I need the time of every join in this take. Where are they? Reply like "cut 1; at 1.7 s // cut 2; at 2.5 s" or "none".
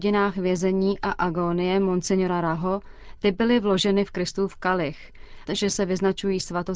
cut 1; at 5.5 s